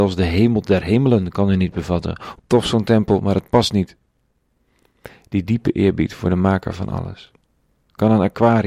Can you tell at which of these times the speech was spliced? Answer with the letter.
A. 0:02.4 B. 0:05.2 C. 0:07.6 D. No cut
A